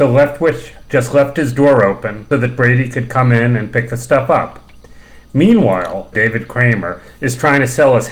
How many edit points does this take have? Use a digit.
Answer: 2